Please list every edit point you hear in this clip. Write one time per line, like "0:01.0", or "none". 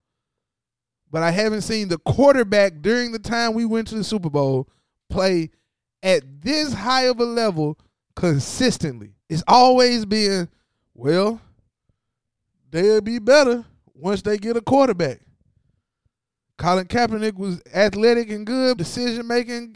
0:09.2
0:16.5
0:18.8